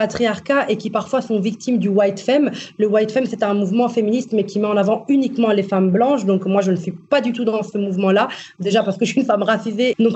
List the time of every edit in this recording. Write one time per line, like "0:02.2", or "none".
none